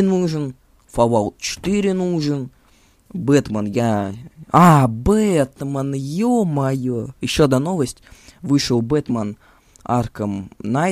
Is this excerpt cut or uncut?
uncut